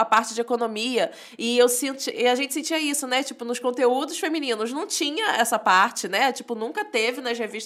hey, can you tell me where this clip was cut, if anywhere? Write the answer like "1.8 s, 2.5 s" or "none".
none